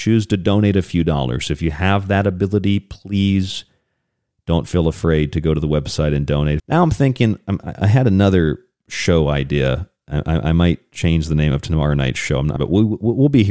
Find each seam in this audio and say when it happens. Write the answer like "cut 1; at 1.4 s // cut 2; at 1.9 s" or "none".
cut 1; at 6.6 s // cut 2; at 12.6 s